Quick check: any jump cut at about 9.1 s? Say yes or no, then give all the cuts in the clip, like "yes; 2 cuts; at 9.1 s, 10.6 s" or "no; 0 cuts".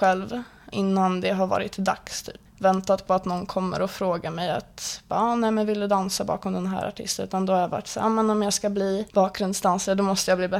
yes; 2 cuts; at 2.5 s, 9.1 s